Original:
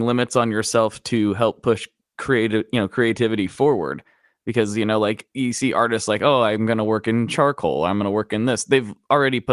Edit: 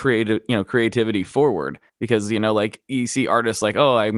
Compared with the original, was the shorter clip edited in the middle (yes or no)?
yes